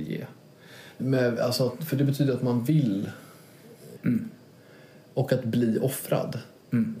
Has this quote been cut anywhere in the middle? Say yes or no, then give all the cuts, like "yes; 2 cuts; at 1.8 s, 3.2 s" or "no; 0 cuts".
yes; 2 cuts; at 1.0 s, 4.0 s